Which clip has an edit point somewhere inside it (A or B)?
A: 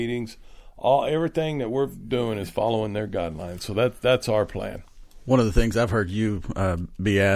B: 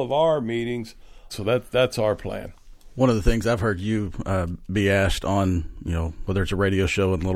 B